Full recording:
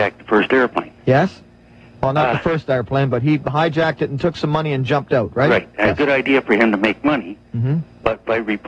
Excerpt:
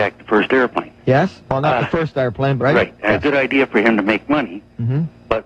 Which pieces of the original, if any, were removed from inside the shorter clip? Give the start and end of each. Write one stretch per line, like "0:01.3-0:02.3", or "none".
0:01.4-0:02.0
0:03.1-0:05.3